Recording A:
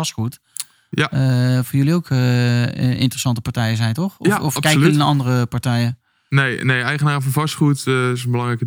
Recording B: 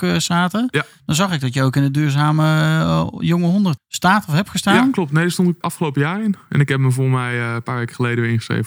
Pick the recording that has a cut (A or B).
B